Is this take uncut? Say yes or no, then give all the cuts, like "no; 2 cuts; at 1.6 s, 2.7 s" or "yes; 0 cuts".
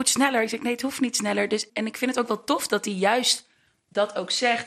no; 1 cut; at 1.7 s